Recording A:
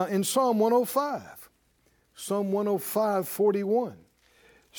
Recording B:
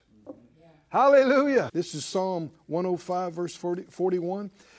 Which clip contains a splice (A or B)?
B